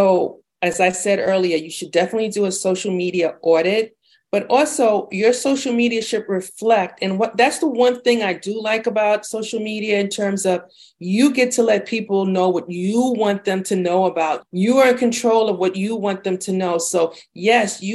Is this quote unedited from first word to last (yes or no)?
no